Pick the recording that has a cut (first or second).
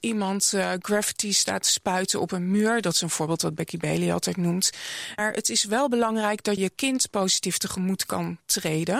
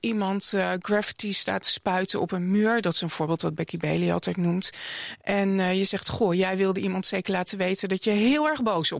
first